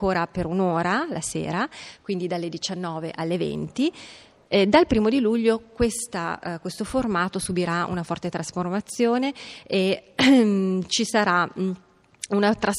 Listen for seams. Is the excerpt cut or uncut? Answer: cut